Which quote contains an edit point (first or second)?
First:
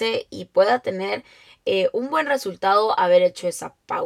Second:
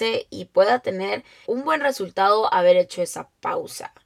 second